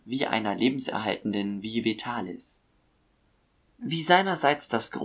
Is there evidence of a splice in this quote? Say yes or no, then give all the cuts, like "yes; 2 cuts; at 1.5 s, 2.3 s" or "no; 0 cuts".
no; 0 cuts